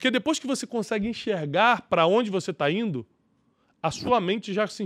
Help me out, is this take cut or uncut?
uncut